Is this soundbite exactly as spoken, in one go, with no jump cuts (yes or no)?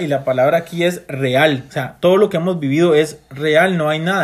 yes